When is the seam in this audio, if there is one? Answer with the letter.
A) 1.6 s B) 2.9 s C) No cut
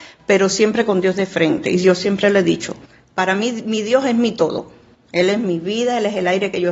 C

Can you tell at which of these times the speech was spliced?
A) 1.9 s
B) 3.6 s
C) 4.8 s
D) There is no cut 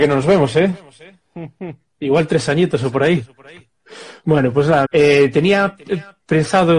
C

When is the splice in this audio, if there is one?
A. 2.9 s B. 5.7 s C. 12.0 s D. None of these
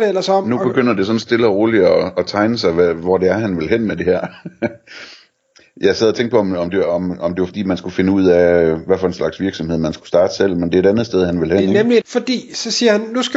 C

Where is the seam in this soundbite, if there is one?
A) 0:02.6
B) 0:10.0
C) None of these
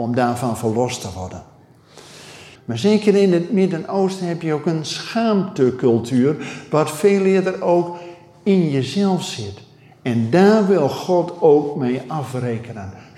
A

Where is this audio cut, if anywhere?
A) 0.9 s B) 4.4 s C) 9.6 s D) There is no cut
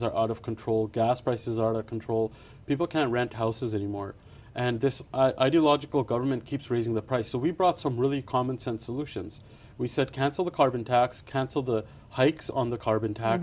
D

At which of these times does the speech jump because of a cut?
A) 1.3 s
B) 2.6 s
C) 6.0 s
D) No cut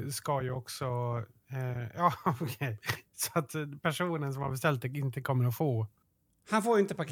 D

